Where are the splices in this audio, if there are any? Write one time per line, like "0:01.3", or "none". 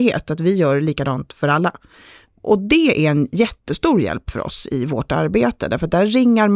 none